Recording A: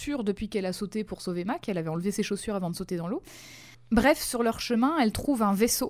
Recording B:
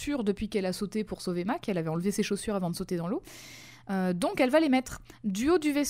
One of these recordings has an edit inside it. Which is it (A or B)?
A